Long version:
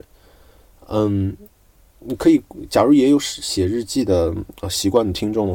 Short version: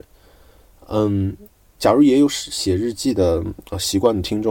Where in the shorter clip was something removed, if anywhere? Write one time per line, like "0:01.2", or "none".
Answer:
0:01.8